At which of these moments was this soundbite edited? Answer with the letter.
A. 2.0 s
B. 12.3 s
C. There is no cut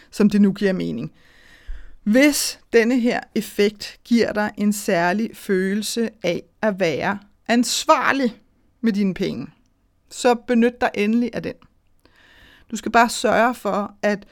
C